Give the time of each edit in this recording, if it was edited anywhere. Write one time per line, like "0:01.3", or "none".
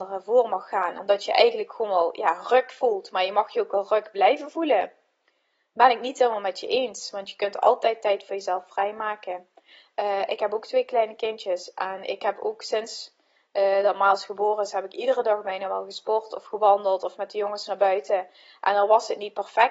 none